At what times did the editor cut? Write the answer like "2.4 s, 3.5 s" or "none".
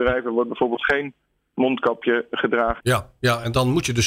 2.8 s

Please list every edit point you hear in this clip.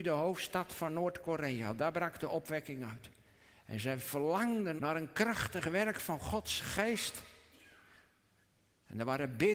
4.8 s

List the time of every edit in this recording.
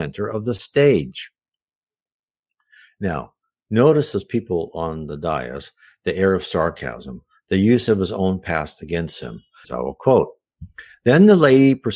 9.6 s

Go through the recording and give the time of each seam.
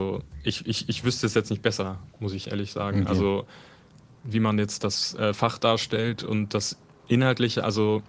none

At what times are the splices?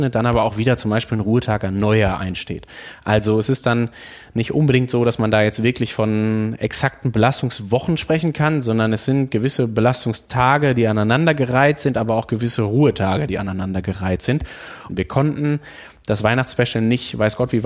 14.9 s

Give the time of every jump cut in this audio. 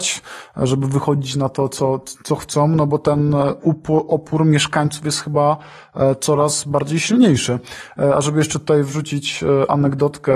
none

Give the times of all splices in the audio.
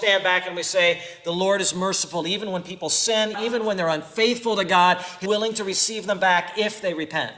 3.3 s, 5.3 s

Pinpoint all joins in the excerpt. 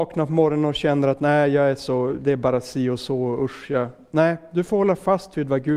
none

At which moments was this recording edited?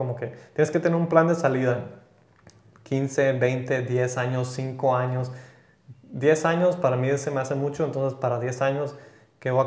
none

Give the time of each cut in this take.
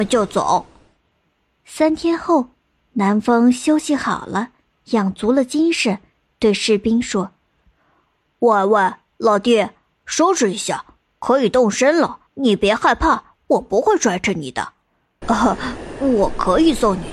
12.3 s, 15.2 s

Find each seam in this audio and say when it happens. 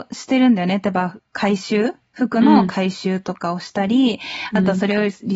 1.2 s

